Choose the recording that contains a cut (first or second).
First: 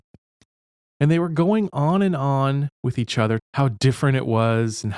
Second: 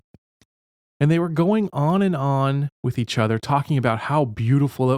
first